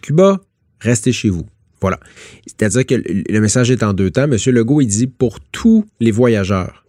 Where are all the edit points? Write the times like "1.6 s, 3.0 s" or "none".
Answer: 1.8 s